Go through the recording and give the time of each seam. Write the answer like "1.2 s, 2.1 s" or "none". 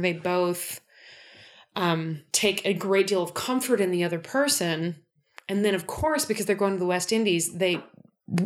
2.3 s